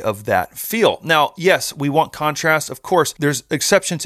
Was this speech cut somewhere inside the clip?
no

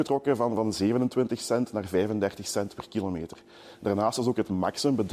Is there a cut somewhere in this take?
no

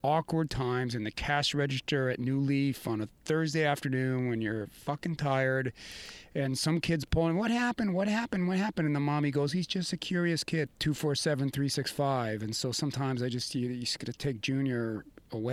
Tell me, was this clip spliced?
yes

